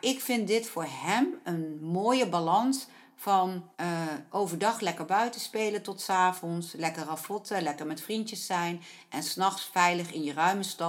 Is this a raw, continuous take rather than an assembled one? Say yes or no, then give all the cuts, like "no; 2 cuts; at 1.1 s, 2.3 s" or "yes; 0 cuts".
no; 1 cut; at 3.7 s